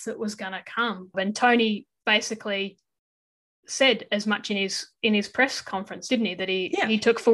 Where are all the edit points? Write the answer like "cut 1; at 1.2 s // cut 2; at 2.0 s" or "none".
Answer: cut 1; at 1.1 s